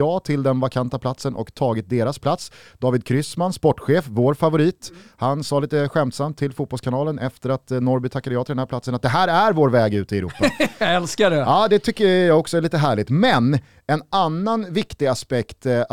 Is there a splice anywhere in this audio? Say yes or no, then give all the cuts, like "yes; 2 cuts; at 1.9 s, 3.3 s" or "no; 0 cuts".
no; 0 cuts